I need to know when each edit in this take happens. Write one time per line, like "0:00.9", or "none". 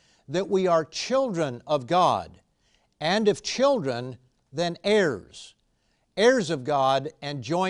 none